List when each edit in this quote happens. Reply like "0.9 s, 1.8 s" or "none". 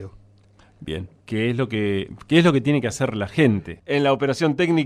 1.2 s, 3.8 s